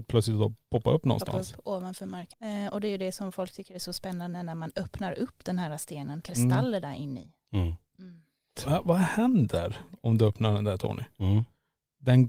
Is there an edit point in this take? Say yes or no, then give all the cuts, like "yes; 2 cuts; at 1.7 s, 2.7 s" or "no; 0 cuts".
yes; 2 cuts; at 2.3 s, 6.2 s